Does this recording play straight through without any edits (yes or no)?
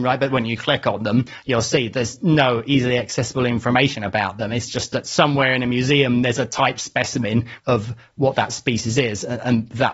no